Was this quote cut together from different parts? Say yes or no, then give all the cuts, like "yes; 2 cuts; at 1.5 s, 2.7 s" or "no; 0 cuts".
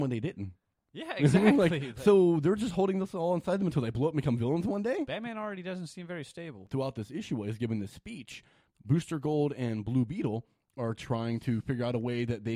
no; 0 cuts